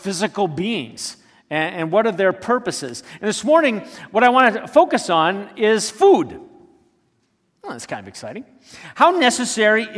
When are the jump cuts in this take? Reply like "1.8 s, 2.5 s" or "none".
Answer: none